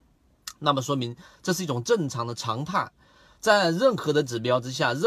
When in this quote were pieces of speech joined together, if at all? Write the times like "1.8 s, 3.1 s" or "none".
3.3 s